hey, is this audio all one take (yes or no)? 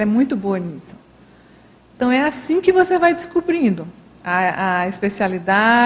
yes